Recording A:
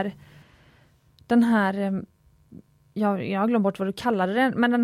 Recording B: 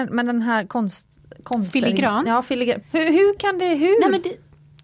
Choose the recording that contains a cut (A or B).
B